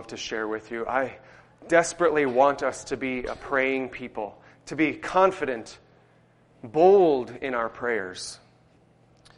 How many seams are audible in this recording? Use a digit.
0